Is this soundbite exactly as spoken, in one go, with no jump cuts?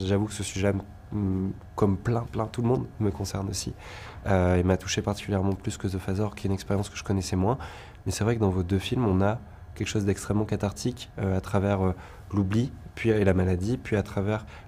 yes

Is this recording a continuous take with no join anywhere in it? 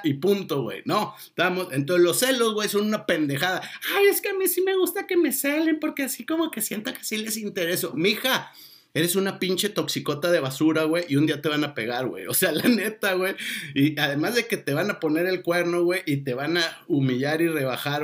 yes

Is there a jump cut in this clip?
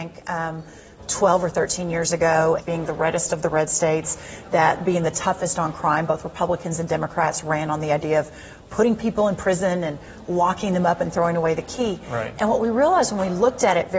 yes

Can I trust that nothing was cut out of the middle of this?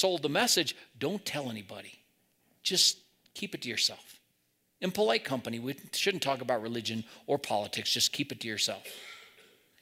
yes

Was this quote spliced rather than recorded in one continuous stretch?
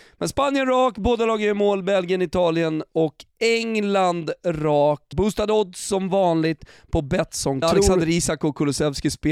yes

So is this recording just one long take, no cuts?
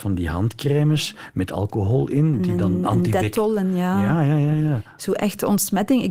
yes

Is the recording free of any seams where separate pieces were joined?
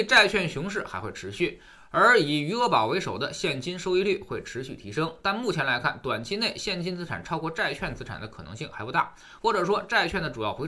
no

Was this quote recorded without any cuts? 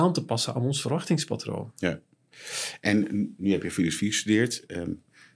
yes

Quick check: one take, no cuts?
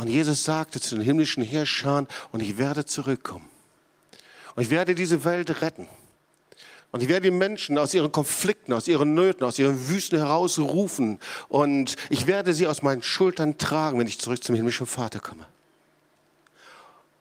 yes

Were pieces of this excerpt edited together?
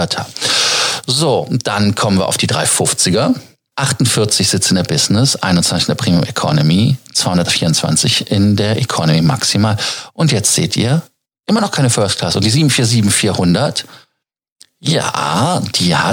yes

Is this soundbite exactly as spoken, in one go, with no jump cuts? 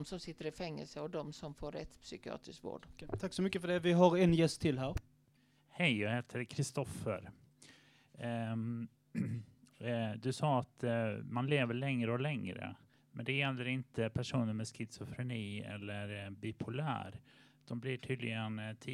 yes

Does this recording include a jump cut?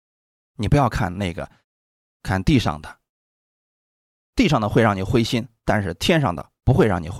no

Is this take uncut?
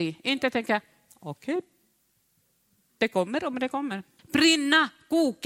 no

